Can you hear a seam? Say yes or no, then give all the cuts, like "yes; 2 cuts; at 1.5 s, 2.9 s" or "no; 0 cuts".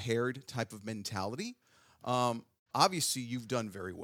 yes; 1 cut; at 2.7 s